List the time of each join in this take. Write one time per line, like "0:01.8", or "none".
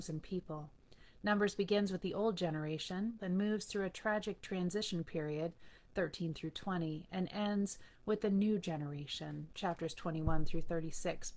0:03.2